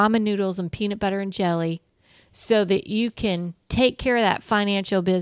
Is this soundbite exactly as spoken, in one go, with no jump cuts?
yes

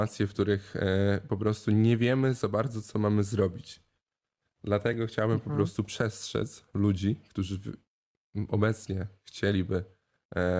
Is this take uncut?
yes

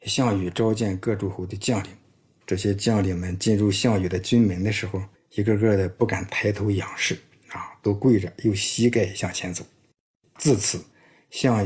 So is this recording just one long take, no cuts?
yes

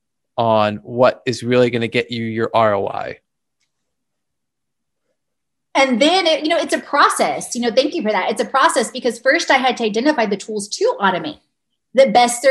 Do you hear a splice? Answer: no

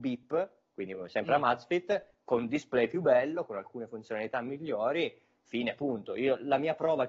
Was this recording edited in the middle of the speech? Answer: no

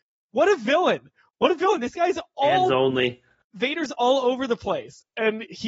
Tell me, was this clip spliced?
no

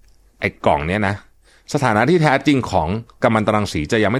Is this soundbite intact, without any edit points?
yes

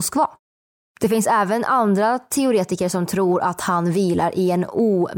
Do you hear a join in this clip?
no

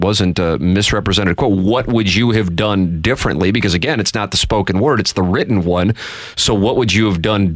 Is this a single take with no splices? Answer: yes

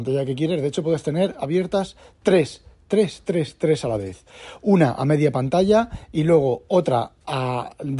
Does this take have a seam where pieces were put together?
no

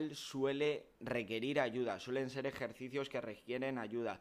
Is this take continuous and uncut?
no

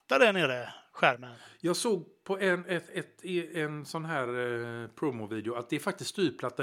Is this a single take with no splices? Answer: yes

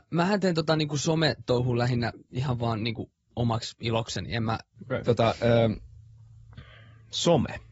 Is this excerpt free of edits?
no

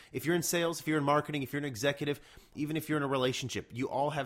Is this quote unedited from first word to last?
no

